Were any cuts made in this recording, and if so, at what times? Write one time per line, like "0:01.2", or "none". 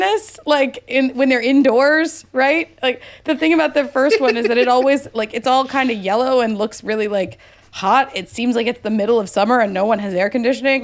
none